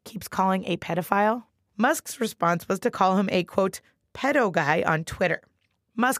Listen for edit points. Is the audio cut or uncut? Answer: cut